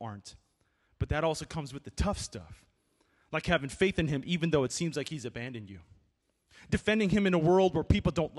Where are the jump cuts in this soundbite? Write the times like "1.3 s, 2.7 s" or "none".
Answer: none